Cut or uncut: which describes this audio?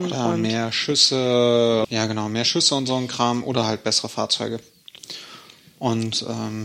cut